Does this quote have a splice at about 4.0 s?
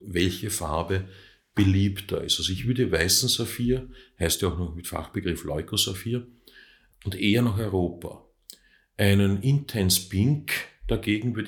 no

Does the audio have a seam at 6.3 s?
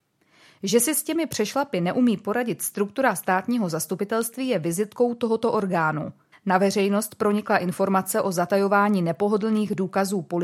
yes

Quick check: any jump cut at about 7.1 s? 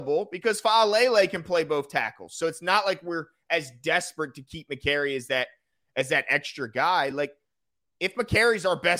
no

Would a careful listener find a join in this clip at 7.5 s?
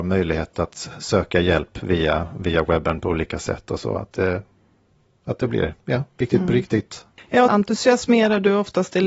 yes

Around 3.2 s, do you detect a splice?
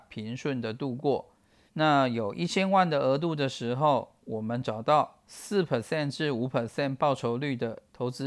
no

